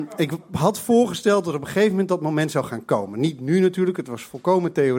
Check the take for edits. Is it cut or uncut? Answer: uncut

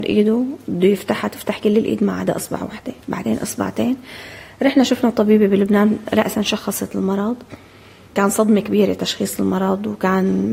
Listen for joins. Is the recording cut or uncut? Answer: cut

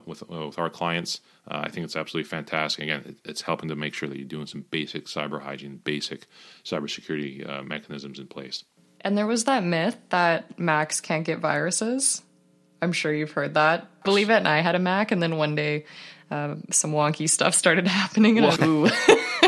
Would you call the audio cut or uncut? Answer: cut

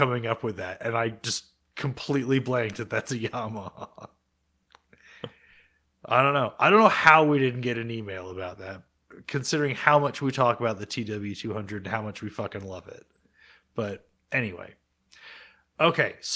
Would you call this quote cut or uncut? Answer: uncut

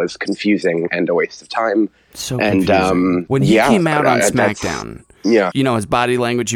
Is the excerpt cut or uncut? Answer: cut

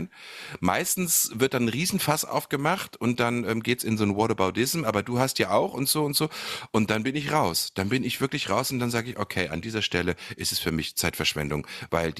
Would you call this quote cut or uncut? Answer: uncut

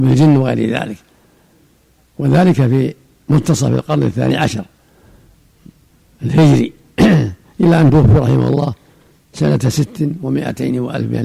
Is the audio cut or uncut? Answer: uncut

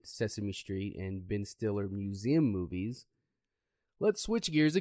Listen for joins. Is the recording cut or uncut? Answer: cut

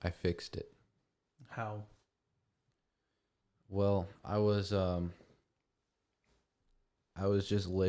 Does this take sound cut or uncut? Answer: uncut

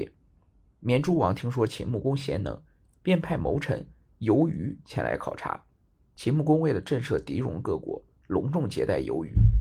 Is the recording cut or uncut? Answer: uncut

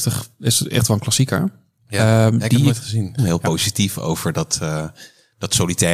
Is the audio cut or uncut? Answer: cut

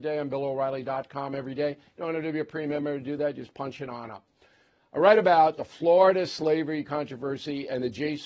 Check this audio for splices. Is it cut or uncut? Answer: uncut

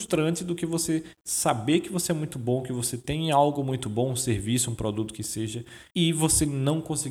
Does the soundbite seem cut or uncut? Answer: cut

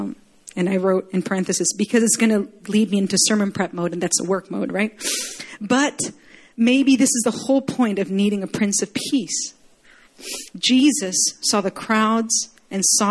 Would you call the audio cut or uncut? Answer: uncut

